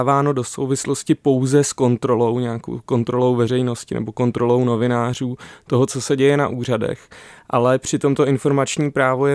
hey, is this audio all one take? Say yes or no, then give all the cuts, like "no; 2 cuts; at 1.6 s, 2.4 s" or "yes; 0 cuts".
yes; 0 cuts